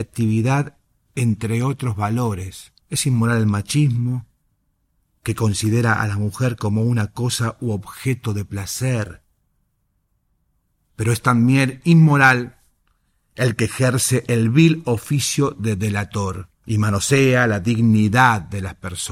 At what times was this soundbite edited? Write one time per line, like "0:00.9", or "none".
0:02.8
0:10.9
0:16.5